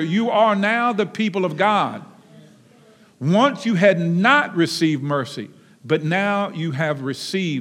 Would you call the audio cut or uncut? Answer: uncut